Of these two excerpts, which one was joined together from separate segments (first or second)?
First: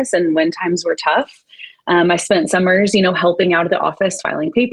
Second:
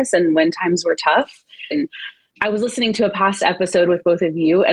second